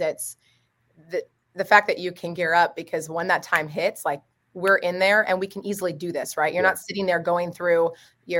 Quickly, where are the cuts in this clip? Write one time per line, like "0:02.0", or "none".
none